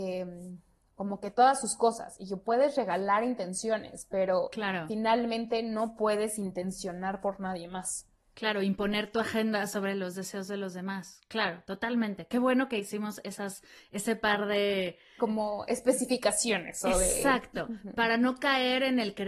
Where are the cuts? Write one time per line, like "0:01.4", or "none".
none